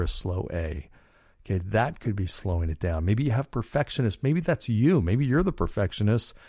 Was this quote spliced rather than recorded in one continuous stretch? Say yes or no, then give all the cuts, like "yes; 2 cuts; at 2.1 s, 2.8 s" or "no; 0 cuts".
no; 0 cuts